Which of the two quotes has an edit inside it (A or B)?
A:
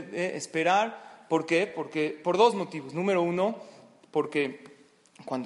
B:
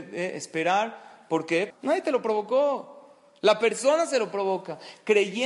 B